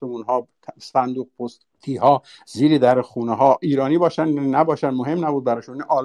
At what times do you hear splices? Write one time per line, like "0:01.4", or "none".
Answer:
0:01.8